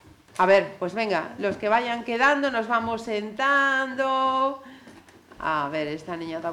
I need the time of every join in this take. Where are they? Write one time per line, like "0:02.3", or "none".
none